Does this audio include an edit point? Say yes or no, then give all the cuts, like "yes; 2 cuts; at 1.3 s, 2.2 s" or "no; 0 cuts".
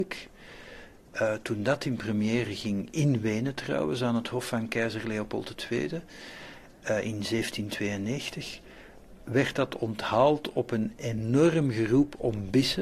no; 0 cuts